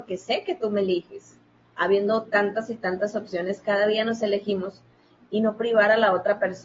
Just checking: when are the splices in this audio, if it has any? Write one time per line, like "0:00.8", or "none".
none